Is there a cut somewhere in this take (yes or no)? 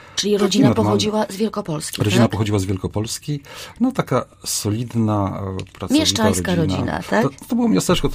no